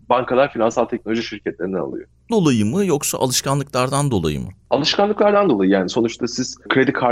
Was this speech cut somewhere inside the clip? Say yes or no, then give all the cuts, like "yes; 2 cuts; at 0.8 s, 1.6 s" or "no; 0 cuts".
yes; 1 cut; at 2.3 s